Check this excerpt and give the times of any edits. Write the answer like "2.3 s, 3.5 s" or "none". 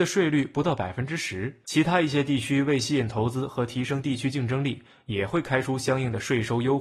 none